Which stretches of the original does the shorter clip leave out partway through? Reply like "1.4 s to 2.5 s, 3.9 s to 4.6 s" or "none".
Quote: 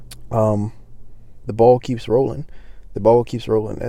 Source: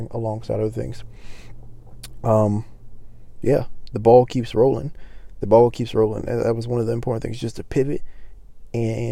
3.4 s to 3.9 s